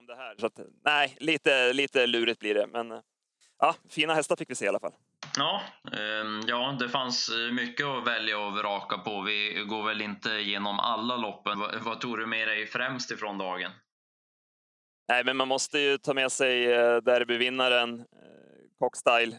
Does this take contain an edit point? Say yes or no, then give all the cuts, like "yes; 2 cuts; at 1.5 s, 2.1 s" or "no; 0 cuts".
yes; 1 cut; at 11.5 s